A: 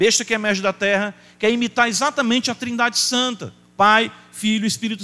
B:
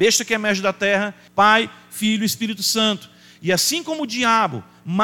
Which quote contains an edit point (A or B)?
B